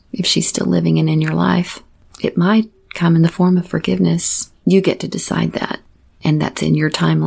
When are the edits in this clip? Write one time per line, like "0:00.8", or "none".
none

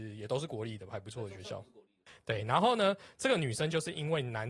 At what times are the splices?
none

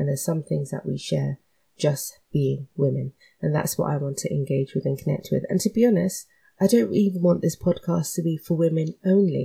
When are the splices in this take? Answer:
none

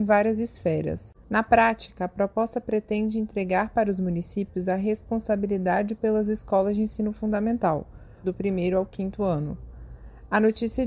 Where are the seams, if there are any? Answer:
0:01.1
0:08.2

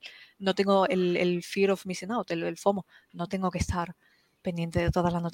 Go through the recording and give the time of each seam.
none

